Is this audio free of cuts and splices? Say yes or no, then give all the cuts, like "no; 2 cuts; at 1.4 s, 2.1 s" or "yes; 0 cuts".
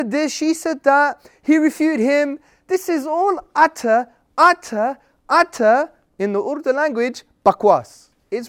yes; 0 cuts